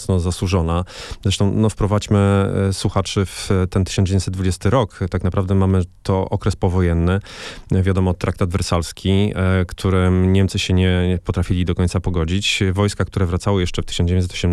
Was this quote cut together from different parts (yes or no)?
no